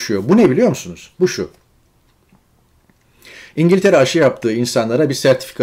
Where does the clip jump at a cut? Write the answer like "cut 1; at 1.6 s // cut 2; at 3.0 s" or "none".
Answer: cut 1; at 1.1 s